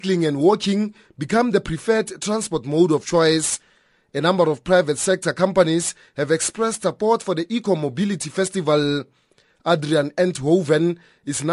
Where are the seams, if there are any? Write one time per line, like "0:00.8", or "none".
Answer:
none